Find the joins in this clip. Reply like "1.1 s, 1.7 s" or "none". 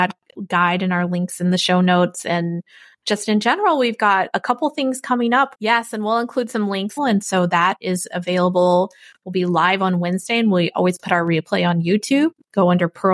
4.3 s, 5.5 s, 7.0 s